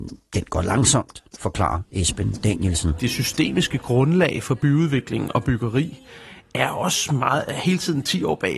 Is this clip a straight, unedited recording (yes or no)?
yes